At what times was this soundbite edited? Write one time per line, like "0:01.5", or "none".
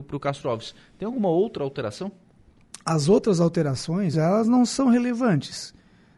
0:04.1

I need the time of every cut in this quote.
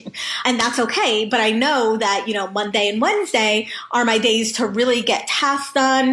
none

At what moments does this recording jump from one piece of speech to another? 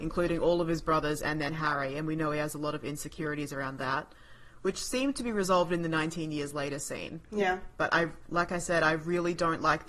none

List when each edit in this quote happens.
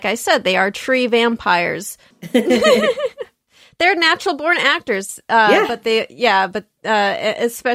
0:02.1

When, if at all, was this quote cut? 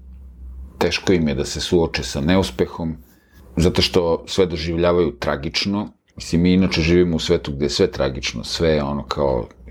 0:06.1

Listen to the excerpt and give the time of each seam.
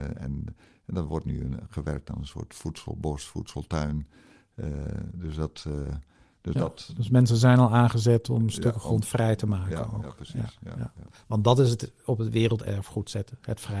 none

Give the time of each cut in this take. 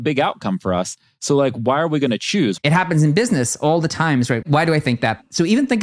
0:02.6
0:04.4

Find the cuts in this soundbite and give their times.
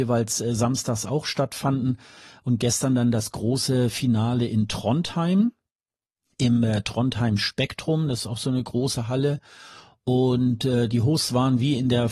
none

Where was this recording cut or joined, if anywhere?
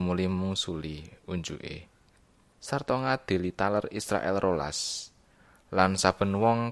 0:02.5

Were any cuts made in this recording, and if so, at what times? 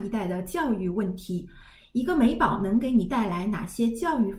none

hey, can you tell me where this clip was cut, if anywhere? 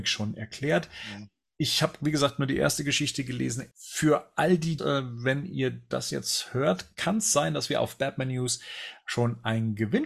0:03.7
0:04.8

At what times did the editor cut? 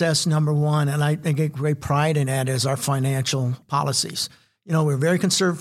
none

